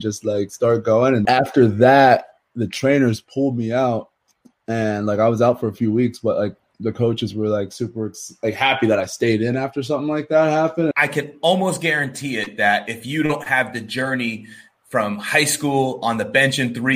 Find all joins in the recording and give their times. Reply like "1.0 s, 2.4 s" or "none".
1.3 s, 10.9 s